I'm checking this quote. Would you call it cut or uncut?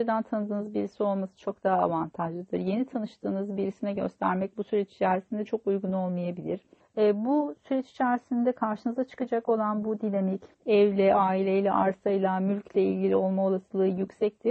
cut